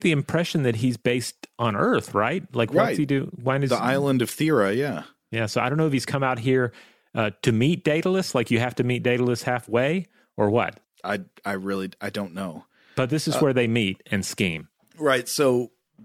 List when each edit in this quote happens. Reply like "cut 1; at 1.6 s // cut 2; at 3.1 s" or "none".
none